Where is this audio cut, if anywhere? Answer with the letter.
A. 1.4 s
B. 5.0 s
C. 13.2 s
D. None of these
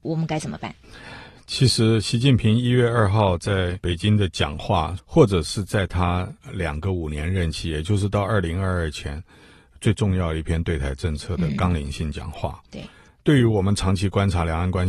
B